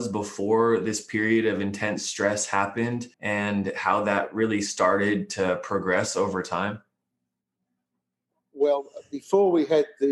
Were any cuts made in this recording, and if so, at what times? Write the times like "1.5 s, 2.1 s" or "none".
3.1 s